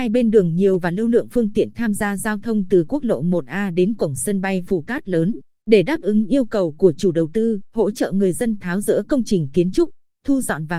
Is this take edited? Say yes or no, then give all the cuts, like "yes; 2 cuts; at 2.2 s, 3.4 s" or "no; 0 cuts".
yes; 2 cuts; at 5.5 s, 7.7 s